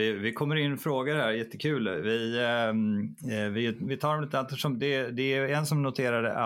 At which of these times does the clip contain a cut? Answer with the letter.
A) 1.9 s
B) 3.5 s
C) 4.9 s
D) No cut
D